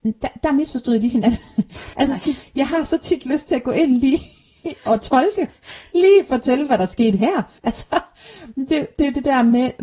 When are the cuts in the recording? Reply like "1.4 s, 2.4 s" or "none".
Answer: 1.9 s, 7.6 s

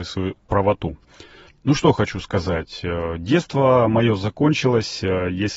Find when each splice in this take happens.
1.5 s

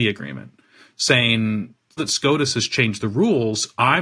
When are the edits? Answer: 2.0 s

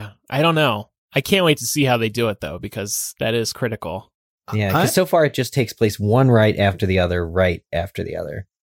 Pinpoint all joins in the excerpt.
none

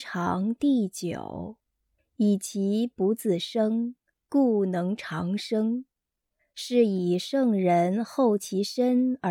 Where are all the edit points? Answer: 2.0 s, 6.4 s

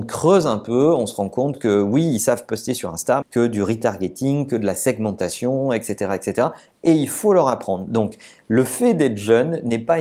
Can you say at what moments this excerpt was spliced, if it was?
3.2 s

